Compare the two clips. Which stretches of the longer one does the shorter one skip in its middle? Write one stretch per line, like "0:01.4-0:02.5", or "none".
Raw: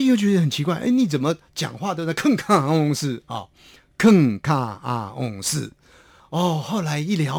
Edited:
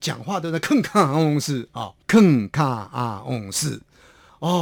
0:03.6-0:03.9